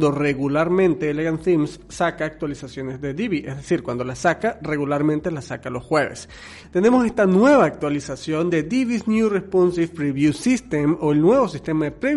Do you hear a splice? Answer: yes; 1 cut; at 6.6 s

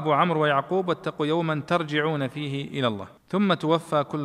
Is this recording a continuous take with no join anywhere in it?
no; 1 cut; at 3.2 s

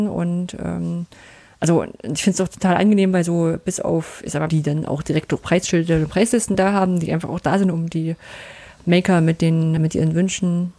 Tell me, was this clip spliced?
yes; 2 cuts; at 4.5 s, 9.8 s

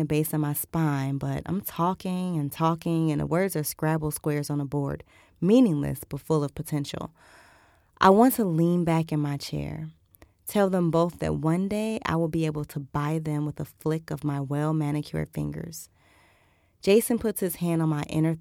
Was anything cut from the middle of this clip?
no; 0 cuts

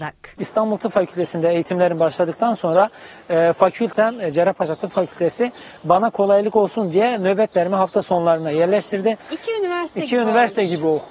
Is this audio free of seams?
yes; 0 cuts

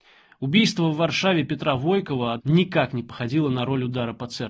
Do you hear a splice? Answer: yes; 1 cut; at 2.4 s

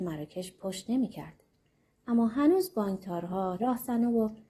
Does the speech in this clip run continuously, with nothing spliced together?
no; 1 cut; at 3.6 s

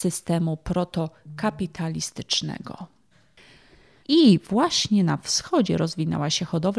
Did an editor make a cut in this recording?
yes; 1 cut; at 4.0 s

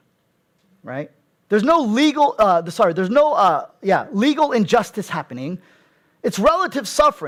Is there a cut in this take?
no; 0 cuts

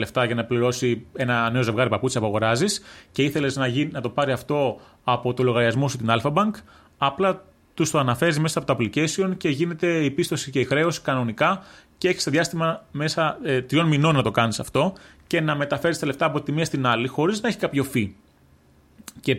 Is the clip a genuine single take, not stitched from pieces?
yes; 0 cuts

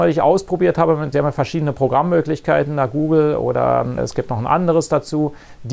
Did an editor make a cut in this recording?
yes; 2 cuts; at 1.1 s, 4.0 s

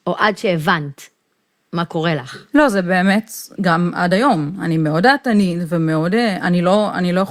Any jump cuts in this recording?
yes; 1 cut; at 3.6 s

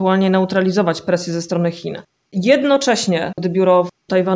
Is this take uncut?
no; 1 cut; at 3.4 s

